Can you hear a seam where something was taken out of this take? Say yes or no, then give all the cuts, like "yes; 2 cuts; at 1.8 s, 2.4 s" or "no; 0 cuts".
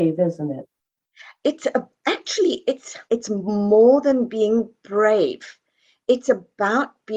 yes; 1 cut; at 3.1 s